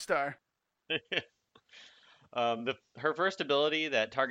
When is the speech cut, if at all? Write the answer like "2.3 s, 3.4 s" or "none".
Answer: none

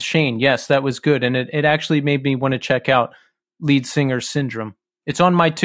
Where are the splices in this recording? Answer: none

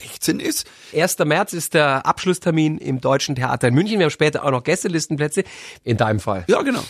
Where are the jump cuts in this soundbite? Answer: 0.9 s, 5.8 s

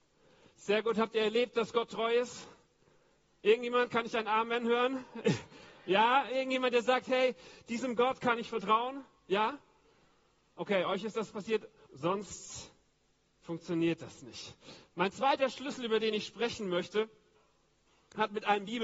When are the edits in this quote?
11.9 s

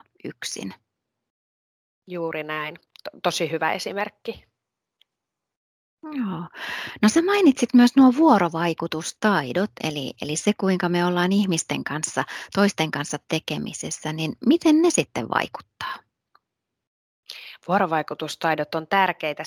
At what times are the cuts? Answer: none

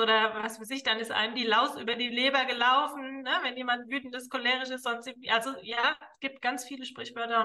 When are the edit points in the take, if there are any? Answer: none

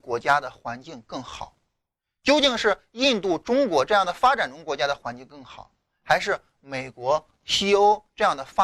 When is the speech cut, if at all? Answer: none

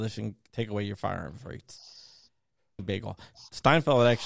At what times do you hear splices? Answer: 2.8 s

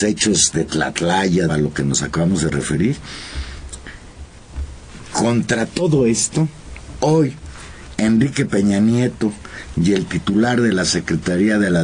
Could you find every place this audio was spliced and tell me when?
1.5 s

